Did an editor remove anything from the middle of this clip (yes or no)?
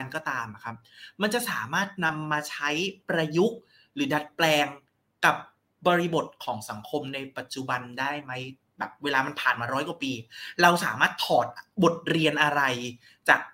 no